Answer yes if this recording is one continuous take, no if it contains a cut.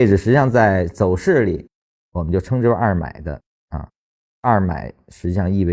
yes